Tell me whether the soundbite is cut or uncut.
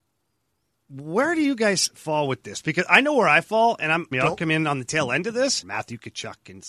cut